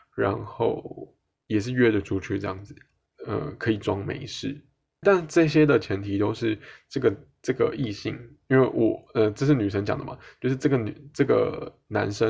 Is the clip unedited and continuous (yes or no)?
no